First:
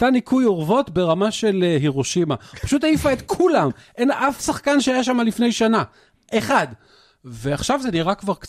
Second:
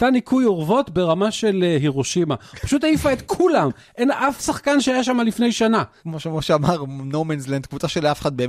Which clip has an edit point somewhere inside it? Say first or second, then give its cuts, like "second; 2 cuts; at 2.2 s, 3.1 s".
second; 1 cut; at 6.0 s